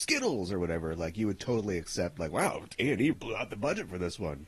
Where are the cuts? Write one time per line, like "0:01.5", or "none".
0:03.1